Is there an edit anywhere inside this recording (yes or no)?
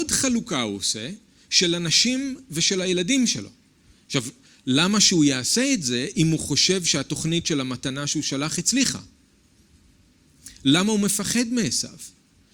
yes